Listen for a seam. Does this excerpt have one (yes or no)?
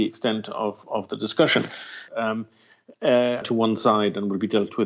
yes